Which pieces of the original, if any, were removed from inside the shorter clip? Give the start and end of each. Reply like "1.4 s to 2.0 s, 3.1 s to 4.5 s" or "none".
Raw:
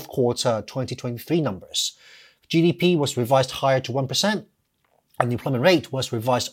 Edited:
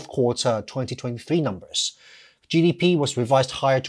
none